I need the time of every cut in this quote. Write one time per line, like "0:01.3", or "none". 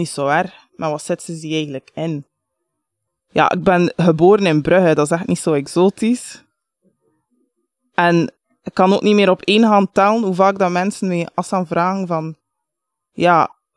0:03.1